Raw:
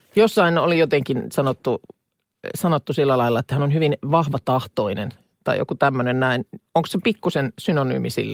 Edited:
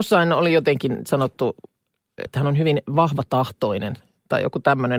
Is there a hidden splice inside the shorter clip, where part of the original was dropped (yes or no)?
yes